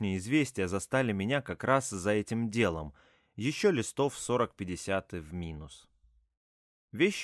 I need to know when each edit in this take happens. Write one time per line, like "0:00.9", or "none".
none